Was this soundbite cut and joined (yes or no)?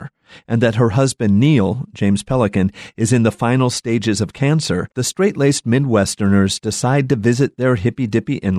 yes